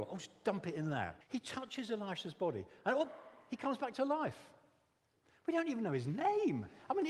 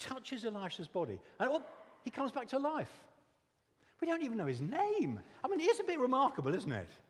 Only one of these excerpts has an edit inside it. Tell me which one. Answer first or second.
first